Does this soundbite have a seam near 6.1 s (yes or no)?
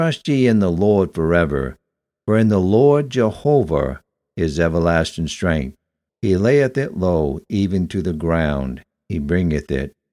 yes